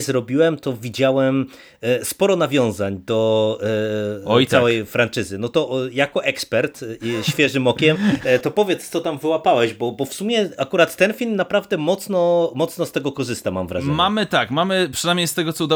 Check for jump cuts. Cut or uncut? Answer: uncut